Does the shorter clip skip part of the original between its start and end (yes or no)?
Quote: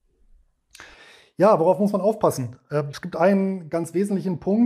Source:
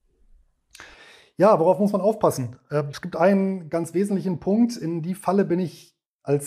no